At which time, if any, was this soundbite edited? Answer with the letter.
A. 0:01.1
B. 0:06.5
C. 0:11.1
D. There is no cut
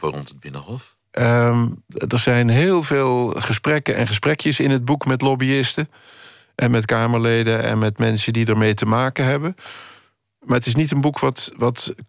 A